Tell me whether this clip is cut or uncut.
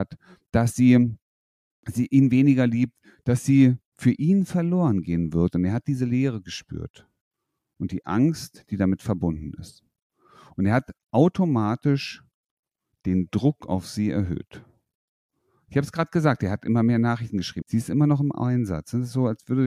cut